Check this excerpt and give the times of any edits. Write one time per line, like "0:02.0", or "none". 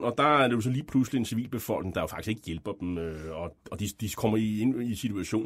none